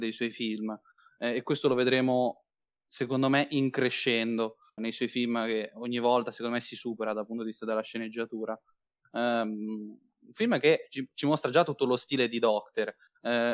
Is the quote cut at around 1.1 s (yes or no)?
no